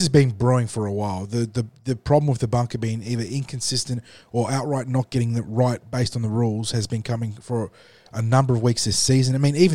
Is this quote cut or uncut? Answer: uncut